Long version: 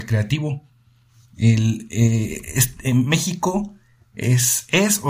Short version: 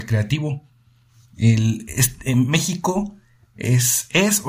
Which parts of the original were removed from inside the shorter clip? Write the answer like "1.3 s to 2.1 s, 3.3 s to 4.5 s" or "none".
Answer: 1.9 s to 2.5 s